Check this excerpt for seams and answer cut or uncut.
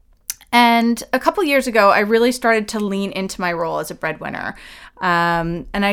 cut